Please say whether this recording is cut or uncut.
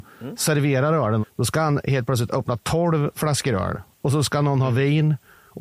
cut